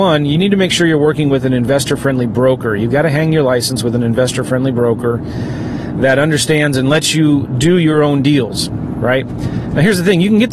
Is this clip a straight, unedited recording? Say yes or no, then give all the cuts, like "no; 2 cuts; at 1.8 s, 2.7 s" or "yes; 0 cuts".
yes; 0 cuts